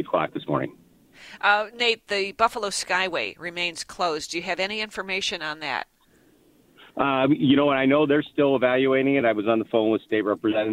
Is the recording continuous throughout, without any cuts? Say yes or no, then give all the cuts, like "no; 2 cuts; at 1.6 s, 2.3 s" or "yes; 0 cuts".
yes; 0 cuts